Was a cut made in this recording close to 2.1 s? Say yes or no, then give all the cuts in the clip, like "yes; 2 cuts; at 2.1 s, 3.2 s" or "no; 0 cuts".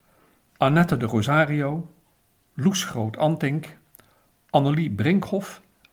no; 0 cuts